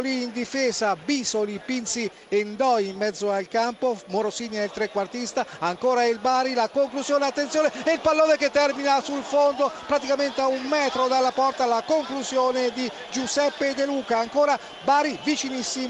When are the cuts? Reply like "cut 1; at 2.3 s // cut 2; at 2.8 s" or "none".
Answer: none